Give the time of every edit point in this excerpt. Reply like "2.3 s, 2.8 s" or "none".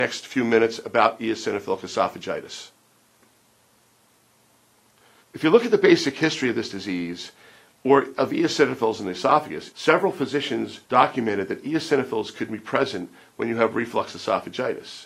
5.2 s, 9.7 s, 10.8 s